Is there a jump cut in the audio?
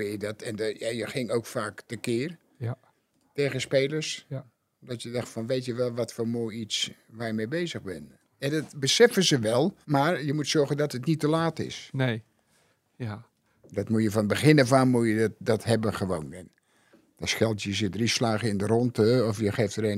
yes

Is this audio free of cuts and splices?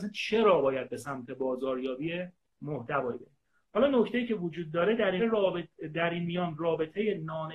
no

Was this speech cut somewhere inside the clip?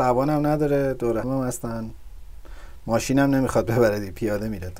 yes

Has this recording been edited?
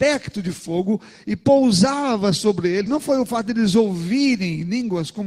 yes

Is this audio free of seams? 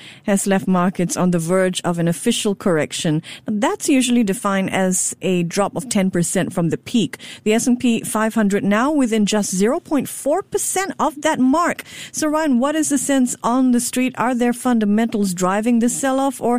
yes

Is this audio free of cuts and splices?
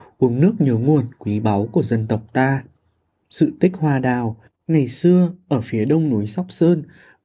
yes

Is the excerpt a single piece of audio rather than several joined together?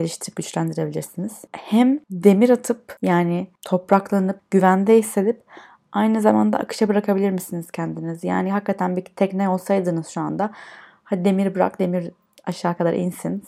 no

